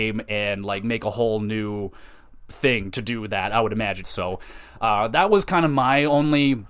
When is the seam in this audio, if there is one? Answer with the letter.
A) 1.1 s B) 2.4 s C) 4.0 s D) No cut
C